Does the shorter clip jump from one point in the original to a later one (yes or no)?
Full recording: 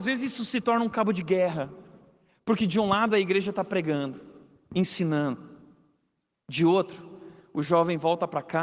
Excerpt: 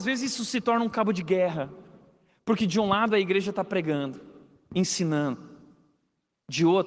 no